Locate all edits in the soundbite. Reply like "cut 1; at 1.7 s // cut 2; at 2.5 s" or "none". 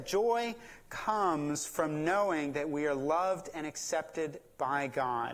none